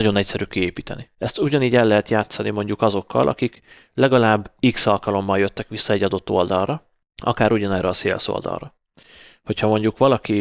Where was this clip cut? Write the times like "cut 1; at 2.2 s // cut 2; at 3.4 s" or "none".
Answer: cut 1; at 1.2 s

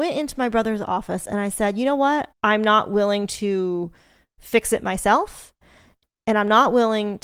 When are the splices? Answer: cut 1; at 2.3 s

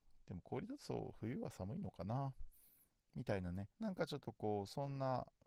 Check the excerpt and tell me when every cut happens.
cut 1; at 3.7 s

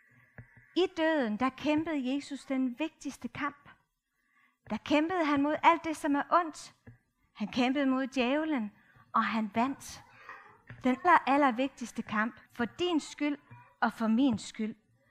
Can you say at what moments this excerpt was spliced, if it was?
cut 1; at 11.0 s // cut 2; at 12.4 s

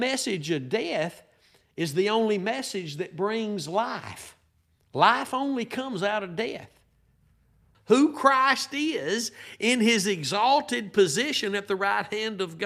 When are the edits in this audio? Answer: cut 1; at 7.7 s

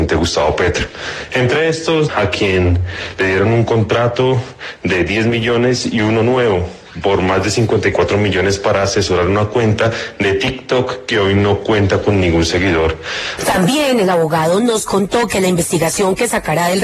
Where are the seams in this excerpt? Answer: cut 1; at 2.1 s // cut 2; at 13.4 s

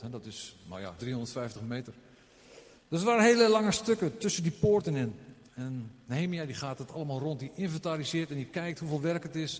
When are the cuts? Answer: cut 1; at 1.0 s

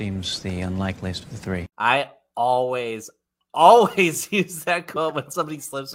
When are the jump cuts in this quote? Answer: cut 1; at 1.7 s

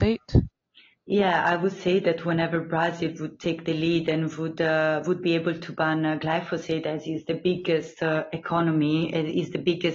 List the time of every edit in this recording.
none

